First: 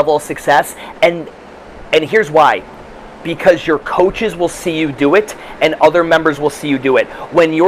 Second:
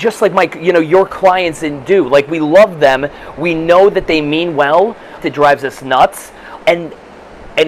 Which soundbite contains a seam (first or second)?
second